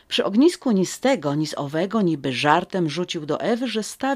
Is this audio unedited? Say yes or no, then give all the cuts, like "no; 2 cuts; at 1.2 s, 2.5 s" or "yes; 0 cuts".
yes; 0 cuts